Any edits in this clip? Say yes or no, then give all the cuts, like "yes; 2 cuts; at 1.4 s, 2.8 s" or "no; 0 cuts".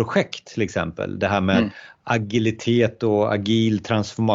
no; 0 cuts